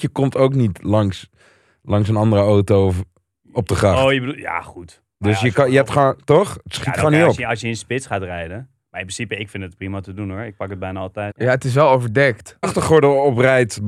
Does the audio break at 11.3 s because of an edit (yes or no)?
yes